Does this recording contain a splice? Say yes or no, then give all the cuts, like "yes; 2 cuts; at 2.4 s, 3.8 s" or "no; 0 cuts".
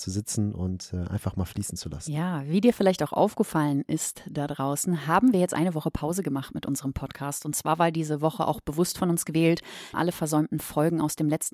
yes; 1 cut; at 9.9 s